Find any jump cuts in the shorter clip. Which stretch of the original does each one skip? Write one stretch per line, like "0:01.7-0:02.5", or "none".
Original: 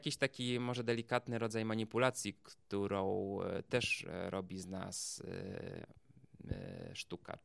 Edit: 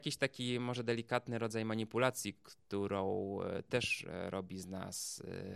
none